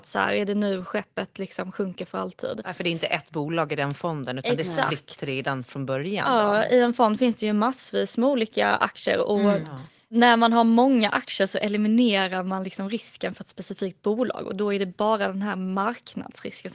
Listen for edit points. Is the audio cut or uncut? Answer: uncut